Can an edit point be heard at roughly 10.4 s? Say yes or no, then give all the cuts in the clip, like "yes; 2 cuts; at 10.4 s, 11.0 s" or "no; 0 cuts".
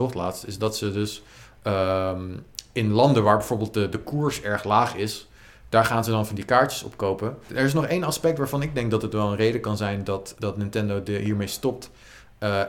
yes; 2 cuts; at 7.5 s, 10.4 s